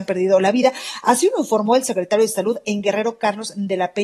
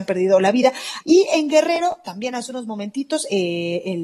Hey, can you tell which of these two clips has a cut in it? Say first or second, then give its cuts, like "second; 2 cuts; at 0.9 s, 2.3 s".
second; 1 cut; at 1.0 s